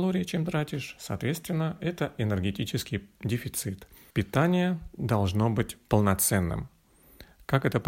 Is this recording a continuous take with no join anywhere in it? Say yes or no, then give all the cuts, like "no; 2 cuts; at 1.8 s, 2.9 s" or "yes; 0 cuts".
no; 1 cut; at 4.1 s